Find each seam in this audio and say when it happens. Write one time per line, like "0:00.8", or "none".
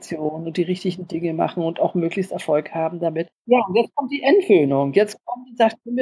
0:03.3